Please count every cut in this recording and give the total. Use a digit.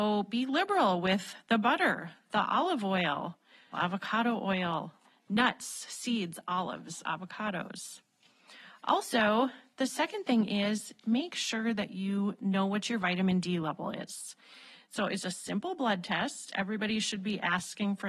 2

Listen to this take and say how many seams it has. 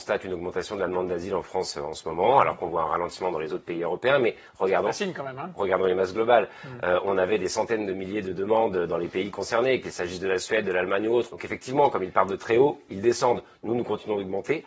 1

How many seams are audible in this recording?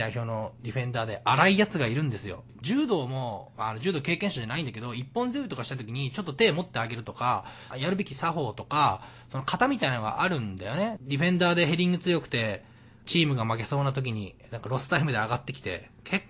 3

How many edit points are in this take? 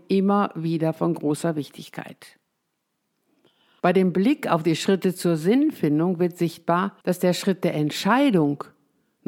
2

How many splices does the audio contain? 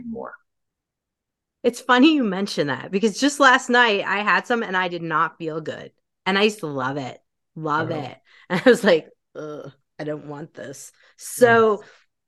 0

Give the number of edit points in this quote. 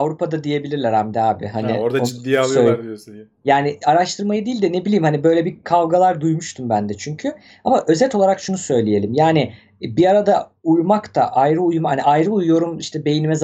0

